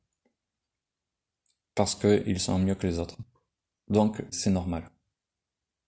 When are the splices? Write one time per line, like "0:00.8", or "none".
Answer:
0:04.3